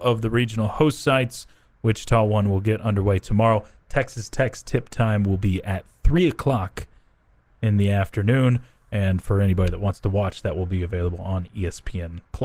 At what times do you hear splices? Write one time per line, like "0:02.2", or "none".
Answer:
none